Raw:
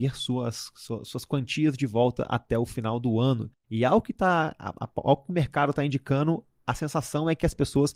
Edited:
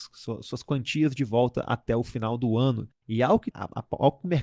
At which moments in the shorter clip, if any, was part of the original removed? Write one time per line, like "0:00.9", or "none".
0:03.5